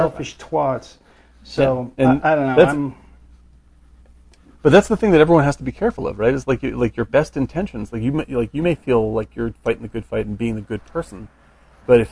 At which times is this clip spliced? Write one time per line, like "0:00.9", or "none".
none